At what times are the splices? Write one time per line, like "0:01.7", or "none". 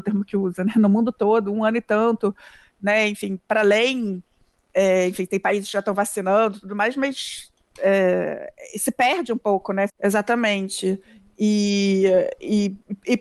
0:09.9